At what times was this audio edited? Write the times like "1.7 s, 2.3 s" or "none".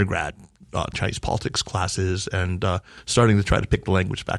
0.9 s